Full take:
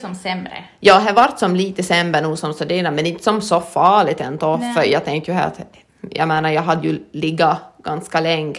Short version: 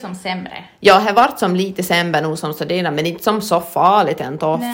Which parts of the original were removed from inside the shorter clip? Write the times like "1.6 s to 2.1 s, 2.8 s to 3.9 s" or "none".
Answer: none